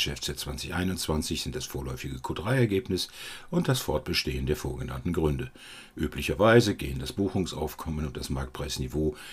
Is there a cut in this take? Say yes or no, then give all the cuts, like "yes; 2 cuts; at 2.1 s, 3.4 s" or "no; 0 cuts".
no; 0 cuts